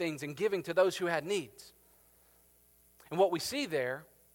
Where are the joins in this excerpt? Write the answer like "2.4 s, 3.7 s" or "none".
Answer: none